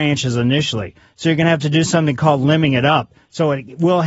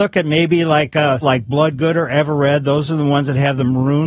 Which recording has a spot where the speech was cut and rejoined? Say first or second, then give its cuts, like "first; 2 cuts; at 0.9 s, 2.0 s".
second; 1 cut; at 1.2 s